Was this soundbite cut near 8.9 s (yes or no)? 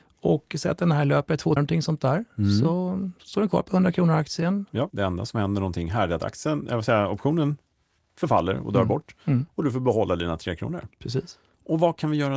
no